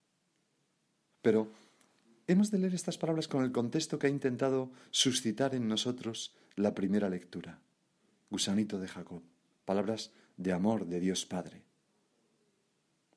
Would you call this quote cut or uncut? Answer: uncut